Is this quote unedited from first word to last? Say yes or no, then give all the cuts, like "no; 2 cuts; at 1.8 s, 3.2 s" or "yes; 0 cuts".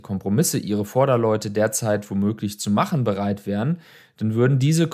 yes; 0 cuts